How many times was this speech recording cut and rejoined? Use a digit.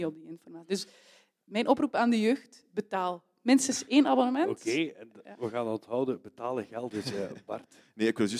1